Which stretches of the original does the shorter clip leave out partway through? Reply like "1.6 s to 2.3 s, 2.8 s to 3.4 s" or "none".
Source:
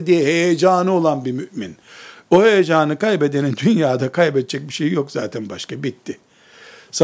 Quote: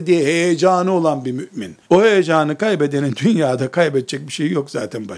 1.8 s to 2.2 s